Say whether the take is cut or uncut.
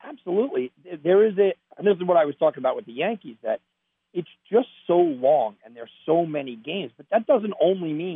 cut